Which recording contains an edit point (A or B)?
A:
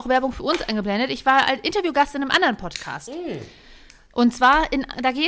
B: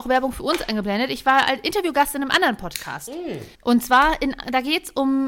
B